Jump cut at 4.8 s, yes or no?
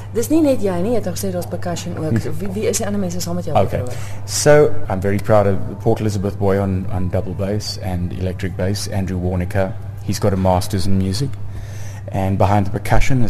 yes